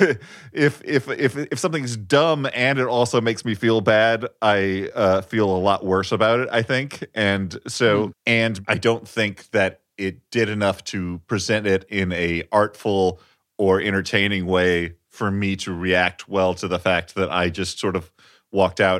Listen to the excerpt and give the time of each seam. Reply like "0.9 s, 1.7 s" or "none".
8.1 s